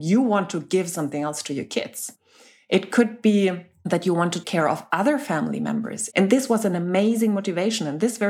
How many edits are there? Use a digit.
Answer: 1